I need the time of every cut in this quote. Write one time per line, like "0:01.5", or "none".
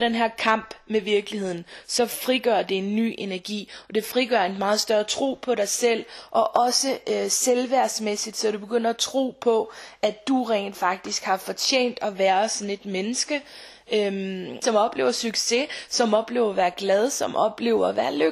0:14.6